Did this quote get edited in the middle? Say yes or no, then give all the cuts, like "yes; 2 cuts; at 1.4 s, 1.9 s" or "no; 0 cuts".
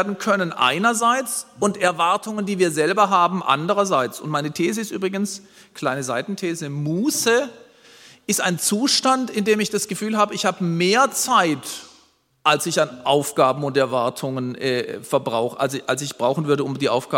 no; 0 cuts